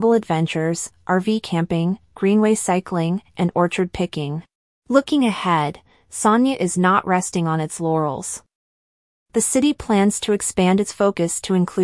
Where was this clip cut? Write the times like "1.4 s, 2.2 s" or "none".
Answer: 4.7 s